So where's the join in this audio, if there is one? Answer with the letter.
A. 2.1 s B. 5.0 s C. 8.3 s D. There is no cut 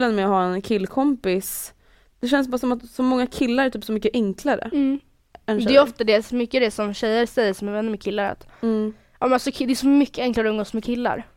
D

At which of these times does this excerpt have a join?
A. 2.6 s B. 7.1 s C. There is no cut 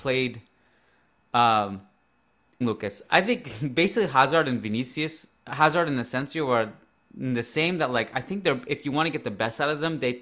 A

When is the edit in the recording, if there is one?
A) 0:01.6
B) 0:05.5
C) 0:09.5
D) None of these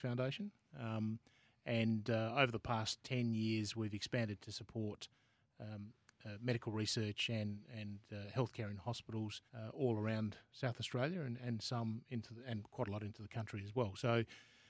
C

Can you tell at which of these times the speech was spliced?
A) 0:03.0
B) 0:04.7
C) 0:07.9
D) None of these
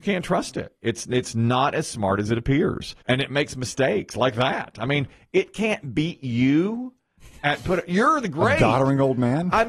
A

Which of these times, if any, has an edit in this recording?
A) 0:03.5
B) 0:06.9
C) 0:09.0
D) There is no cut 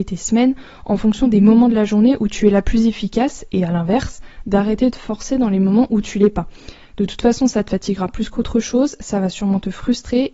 D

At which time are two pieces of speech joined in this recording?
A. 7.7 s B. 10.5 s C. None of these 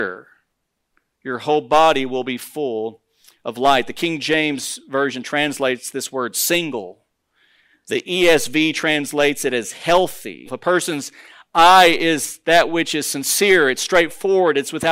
B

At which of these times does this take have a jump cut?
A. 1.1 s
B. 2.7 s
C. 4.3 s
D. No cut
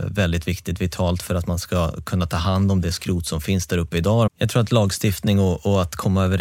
C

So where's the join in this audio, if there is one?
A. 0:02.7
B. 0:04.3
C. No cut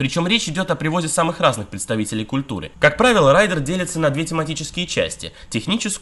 A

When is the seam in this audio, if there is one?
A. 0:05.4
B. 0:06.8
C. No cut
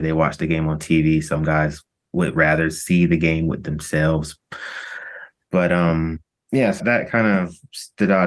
B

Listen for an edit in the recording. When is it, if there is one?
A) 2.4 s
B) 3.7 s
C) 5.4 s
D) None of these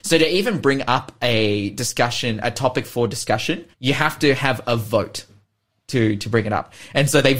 B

